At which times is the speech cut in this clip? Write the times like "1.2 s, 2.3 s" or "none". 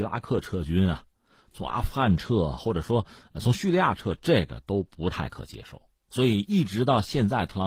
6.1 s